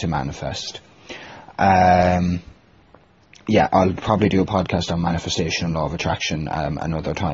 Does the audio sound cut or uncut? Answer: uncut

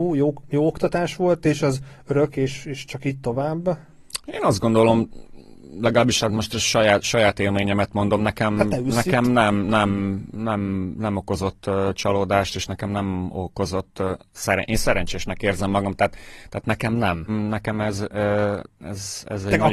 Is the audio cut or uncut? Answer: cut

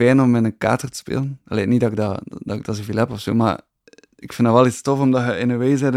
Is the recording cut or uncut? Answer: uncut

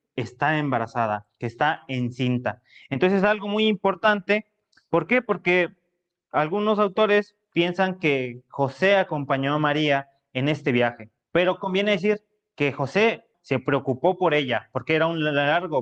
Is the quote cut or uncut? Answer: cut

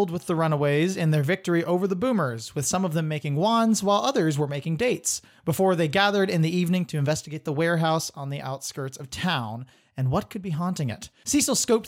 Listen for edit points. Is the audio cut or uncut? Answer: uncut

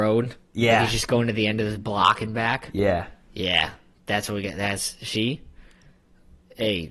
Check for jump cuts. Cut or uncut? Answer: uncut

